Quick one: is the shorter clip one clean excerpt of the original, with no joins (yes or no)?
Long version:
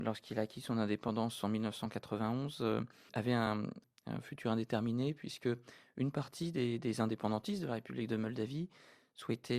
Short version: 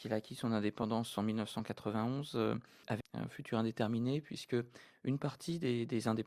no